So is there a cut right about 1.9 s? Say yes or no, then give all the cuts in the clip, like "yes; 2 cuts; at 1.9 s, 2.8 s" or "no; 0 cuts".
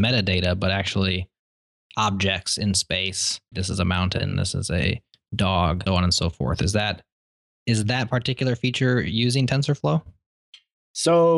no; 2 cuts; at 3.5 s, 5.9 s